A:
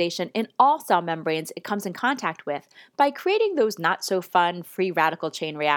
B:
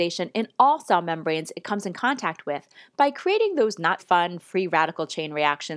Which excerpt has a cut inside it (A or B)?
B